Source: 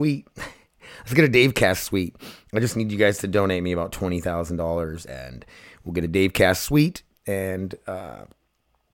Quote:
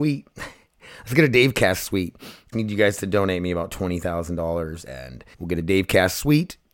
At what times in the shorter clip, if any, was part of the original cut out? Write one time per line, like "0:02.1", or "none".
0:02.5
0:05.3

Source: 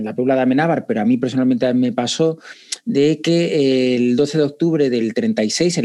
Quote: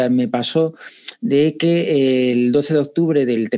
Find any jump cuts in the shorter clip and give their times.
none

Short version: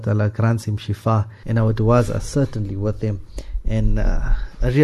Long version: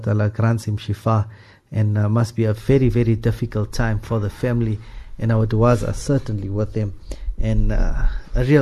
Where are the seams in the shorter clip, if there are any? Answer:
0:01.4

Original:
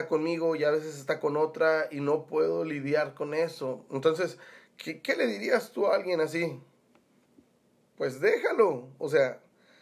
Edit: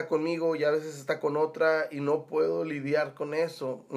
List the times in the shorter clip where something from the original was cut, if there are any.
none

